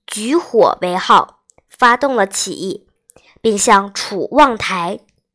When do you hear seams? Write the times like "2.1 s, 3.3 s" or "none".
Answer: none